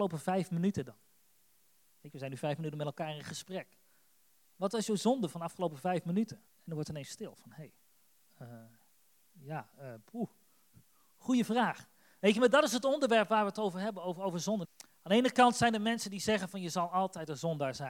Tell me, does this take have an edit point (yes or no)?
yes